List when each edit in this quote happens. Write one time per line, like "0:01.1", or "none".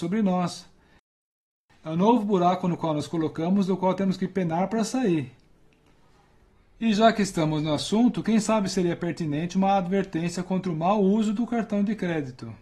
none